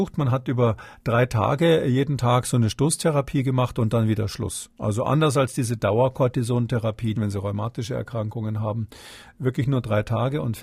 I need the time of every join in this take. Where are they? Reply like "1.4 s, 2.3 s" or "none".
7.2 s